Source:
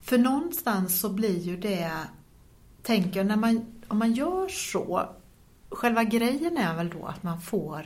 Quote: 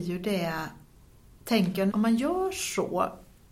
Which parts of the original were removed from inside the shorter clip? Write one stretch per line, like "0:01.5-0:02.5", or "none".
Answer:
0:03.3-0:03.9